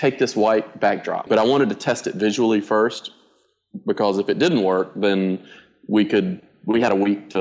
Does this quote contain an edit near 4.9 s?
no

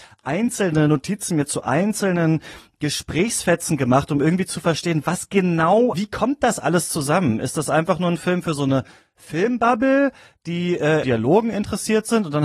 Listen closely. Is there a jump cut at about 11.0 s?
yes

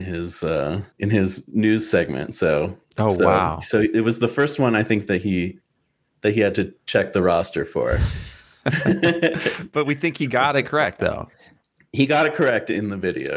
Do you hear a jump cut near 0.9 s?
yes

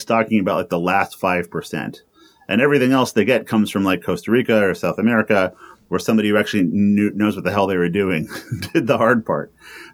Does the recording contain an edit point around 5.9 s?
no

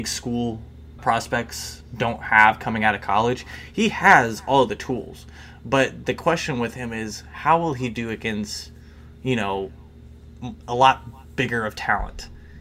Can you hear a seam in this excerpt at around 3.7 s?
no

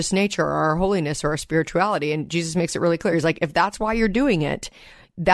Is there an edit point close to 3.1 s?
no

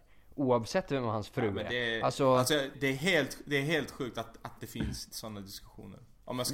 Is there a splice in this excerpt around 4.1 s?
no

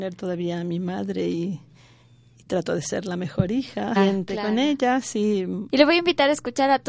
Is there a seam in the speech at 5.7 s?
yes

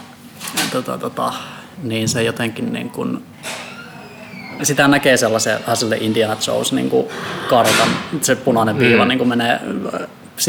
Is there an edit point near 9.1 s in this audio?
no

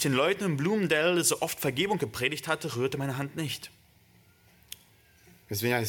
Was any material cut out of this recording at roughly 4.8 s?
no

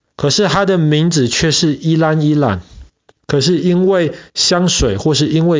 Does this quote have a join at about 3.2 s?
yes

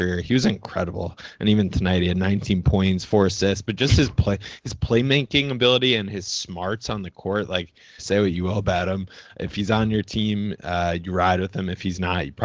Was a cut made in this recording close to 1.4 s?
no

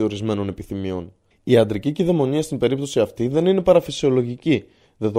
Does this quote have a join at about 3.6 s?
no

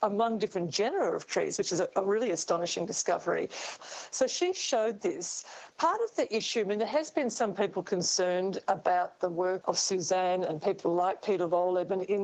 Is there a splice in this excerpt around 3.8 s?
yes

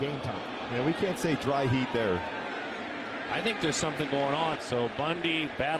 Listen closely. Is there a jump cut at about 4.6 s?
yes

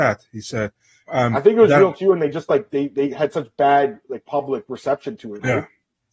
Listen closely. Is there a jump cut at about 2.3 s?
no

